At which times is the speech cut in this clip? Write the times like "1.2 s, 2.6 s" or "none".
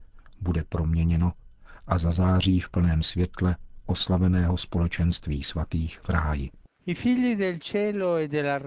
none